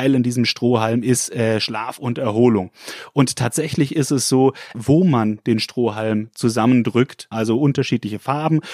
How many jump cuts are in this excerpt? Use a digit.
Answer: 2